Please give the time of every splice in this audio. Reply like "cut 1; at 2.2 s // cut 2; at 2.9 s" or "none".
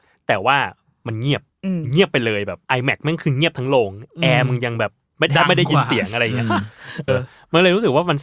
cut 1; at 2.7 s // cut 2; at 7.1 s